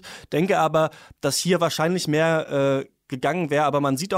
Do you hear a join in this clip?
no; 0 cuts

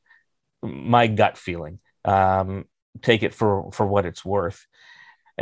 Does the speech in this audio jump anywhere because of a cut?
no; 0 cuts

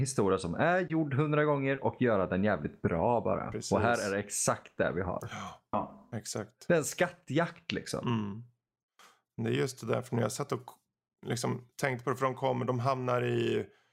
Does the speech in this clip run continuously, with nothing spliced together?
yes; 0 cuts

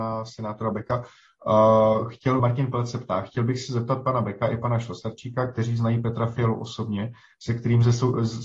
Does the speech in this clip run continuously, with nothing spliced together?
no; 1 cut; at 2.4 s

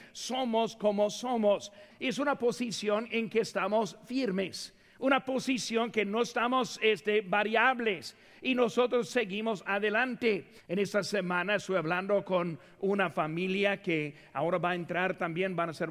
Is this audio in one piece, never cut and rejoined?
no; 2 cuts; at 1.9 s, 10.6 s

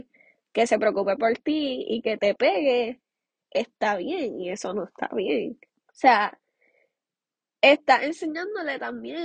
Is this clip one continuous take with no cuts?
no; 1 cut; at 5.7 s

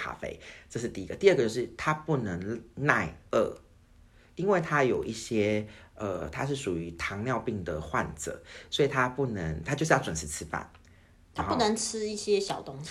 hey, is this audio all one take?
yes; 0 cuts

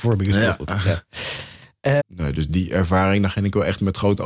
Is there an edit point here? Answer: yes; 1 cut; at 2.0 s

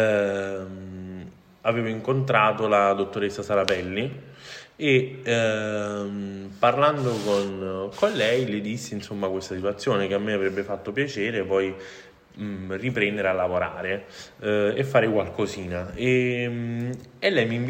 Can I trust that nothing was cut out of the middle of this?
yes; 0 cuts

